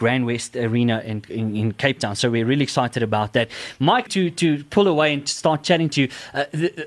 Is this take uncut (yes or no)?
no